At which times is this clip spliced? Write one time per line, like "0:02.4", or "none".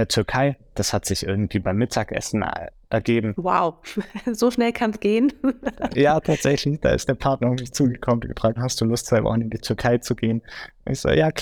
0:05.9
0:08.6